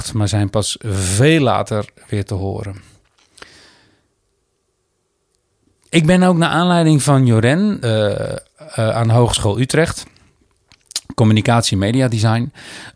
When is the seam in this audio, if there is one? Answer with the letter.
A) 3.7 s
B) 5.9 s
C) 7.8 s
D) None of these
C